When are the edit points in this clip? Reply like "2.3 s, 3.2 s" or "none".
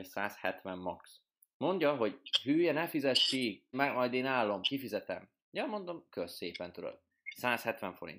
3.7 s

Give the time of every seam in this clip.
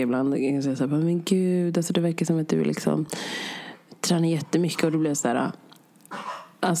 none

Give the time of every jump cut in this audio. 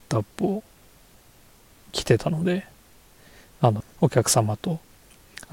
3.8 s

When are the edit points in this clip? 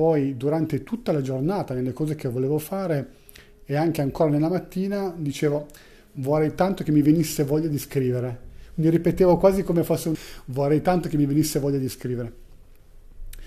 10.1 s

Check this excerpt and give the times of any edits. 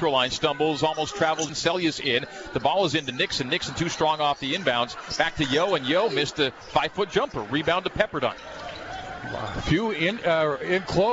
1.5 s

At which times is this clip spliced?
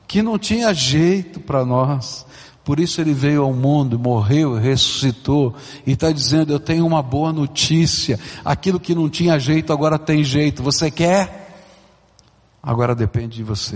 none

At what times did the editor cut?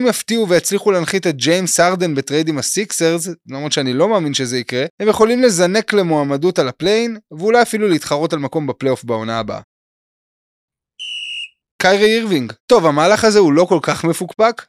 4.9 s, 12.6 s

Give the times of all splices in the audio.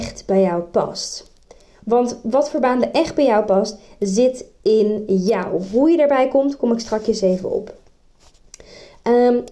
none

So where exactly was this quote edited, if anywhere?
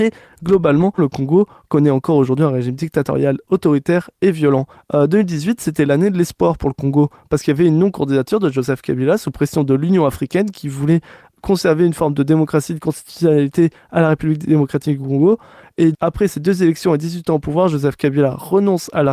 1.0 s, 4.7 s, 15.9 s

